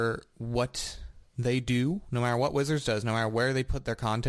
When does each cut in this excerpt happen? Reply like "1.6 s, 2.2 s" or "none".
1.3 s